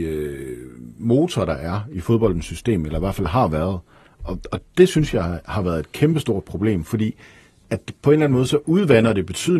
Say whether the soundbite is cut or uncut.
uncut